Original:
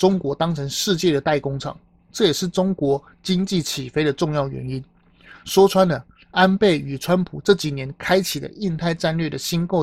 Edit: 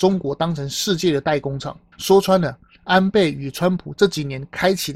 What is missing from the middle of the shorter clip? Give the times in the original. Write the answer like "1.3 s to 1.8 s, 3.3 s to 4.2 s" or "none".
1.9 s to 5.4 s